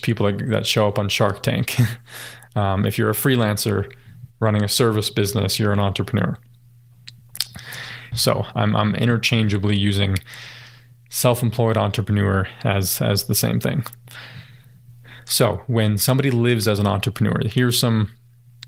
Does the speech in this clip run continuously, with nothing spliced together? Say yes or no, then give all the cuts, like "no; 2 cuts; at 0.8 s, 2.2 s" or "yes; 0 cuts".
no; 1 cut; at 8.1 s